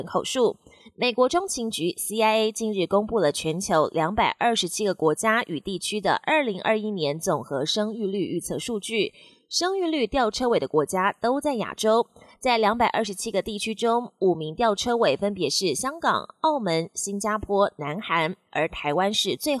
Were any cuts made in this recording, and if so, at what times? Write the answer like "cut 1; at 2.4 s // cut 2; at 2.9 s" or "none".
none